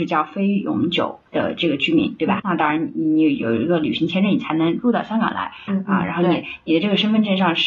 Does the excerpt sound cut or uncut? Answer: cut